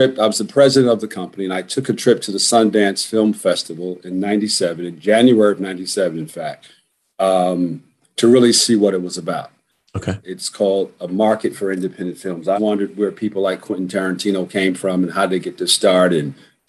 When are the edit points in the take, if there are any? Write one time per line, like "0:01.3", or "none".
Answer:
0:10.2
0:12.6